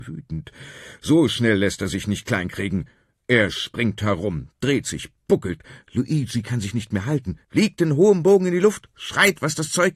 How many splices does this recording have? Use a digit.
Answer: 0